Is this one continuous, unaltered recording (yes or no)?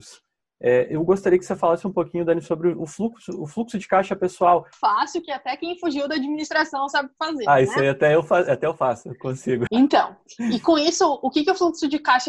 no